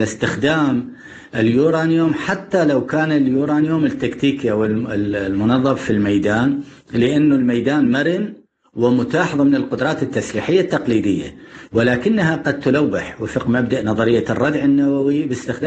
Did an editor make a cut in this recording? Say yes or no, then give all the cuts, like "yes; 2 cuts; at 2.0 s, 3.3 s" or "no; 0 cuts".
no; 0 cuts